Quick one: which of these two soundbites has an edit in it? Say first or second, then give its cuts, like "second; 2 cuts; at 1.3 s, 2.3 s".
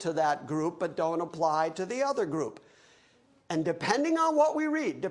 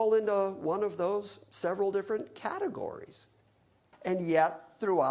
second; 1 cut; at 3.9 s